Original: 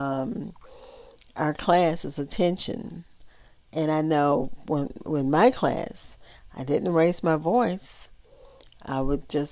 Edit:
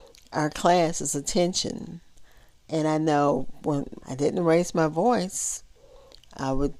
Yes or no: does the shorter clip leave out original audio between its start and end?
yes